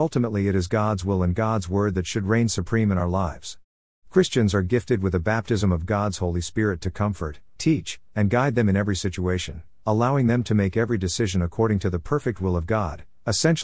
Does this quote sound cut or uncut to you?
uncut